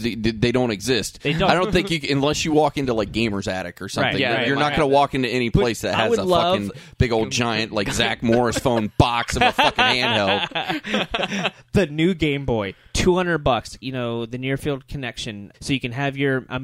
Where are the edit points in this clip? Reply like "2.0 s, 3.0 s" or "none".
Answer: 13.8 s, 15.5 s